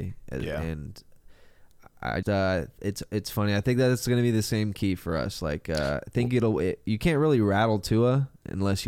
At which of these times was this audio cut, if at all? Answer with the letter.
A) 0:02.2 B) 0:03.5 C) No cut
A